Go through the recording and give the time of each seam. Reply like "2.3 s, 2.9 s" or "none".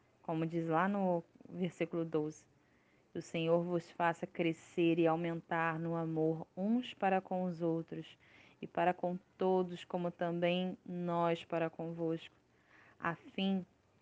none